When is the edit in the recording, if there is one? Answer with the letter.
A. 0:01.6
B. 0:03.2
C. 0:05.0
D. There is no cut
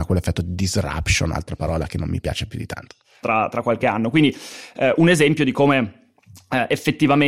B